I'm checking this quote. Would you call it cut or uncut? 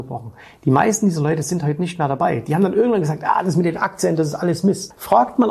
uncut